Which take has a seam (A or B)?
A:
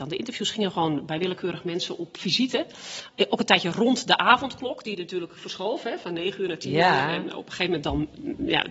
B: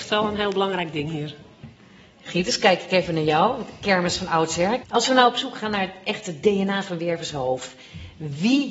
B